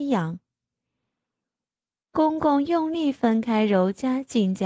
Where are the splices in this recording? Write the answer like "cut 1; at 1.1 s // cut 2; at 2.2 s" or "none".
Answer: none